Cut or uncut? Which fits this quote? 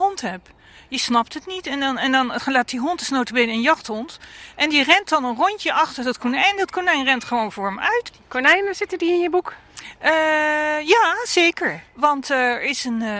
uncut